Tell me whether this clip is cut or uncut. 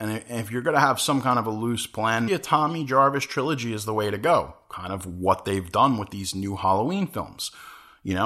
cut